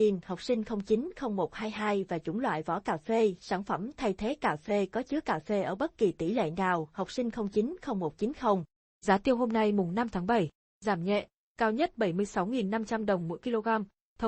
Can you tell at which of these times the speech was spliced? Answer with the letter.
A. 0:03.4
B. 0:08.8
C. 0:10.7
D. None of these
D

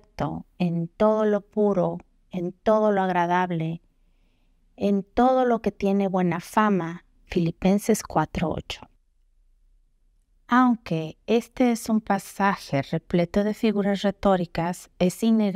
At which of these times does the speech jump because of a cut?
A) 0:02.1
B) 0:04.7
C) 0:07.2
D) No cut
C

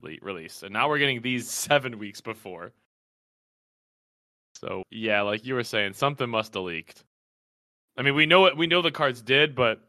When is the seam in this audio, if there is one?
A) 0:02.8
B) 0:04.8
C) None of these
B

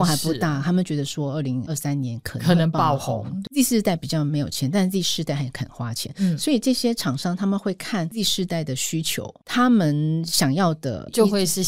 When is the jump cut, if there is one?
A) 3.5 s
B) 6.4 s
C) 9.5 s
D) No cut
A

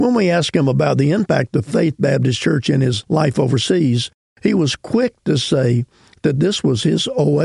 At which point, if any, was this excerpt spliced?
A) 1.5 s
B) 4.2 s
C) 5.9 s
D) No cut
D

